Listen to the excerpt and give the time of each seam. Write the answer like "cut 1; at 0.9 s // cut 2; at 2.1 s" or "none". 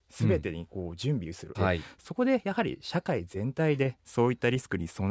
cut 1; at 1.5 s